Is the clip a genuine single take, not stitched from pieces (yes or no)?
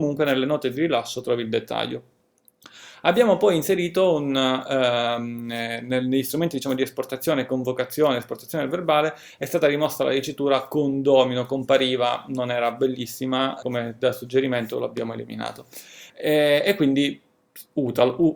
no